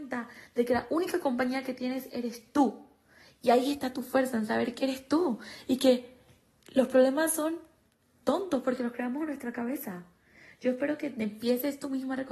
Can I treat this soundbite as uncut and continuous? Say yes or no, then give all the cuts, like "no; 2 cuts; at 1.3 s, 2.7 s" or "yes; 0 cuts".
yes; 0 cuts